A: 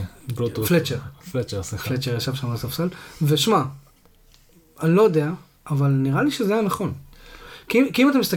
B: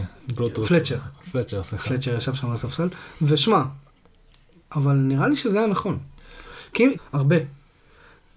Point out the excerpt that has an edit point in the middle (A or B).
B